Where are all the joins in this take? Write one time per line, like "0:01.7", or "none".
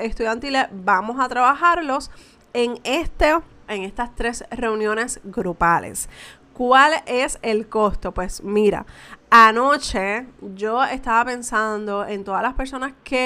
0:03.7